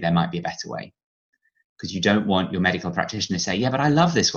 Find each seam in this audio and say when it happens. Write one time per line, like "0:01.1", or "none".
none